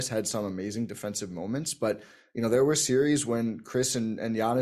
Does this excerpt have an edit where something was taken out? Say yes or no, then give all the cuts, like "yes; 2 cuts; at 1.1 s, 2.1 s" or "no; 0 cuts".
no; 0 cuts